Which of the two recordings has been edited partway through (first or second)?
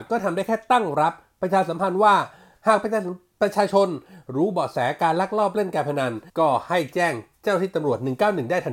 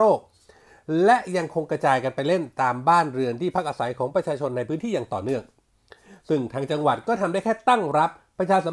first